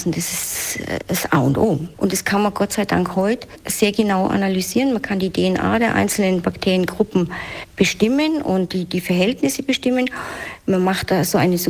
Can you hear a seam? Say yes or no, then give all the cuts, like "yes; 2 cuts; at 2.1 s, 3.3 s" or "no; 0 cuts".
yes; 1 cut; at 1.9 s